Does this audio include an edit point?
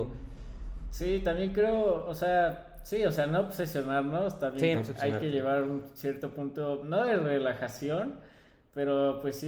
yes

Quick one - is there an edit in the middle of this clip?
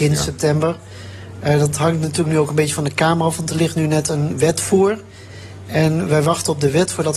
no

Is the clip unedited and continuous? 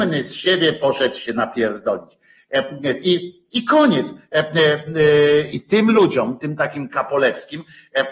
no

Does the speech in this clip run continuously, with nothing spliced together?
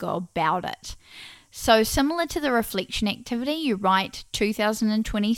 yes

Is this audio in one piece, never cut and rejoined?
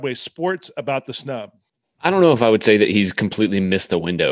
yes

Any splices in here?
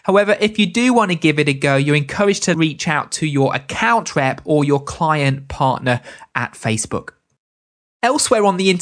no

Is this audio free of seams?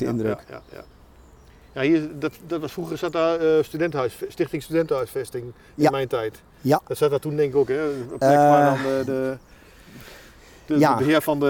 yes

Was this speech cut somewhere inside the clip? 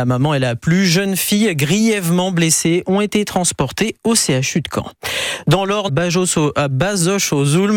yes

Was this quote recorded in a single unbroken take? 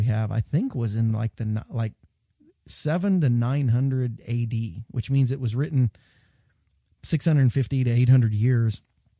yes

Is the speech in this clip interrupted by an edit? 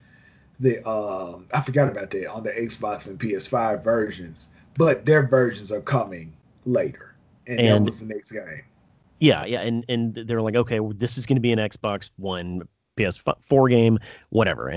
yes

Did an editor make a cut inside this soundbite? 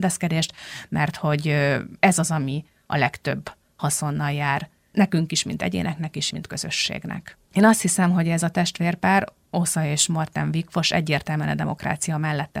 yes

